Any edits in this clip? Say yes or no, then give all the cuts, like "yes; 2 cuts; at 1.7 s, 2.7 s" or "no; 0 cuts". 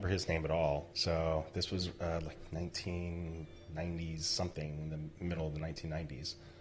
yes; 1 cut; at 0.9 s